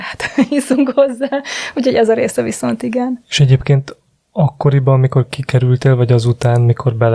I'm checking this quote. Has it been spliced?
no; 0 cuts

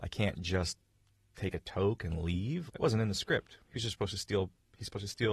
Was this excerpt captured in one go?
no; 1 cut; at 2.7 s

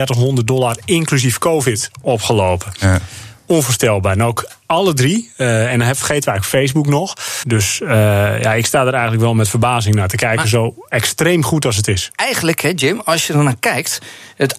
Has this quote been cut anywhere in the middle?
yes; 1 cut; at 7.4 s

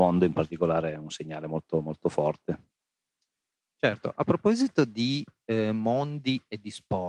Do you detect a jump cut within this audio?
no; 0 cuts

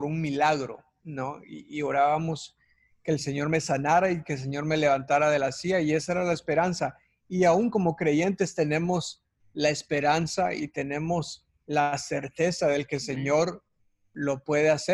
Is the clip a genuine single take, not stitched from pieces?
yes; 0 cuts

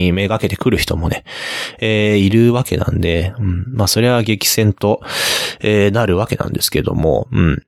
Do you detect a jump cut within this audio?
no; 0 cuts

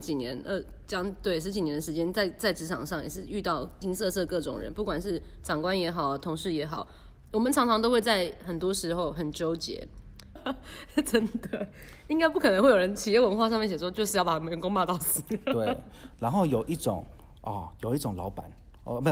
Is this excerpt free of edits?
no; 2 cuts; at 3.8 s, 10.4 s

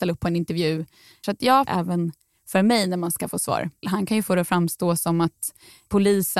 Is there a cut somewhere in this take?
yes; 2 cuts; at 1.7 s, 3.8 s

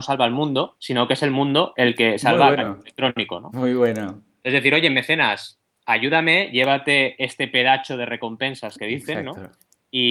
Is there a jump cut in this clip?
no; 0 cuts

